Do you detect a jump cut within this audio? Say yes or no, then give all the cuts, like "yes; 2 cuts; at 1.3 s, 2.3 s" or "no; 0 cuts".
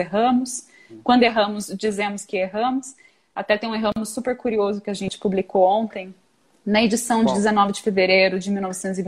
no; 0 cuts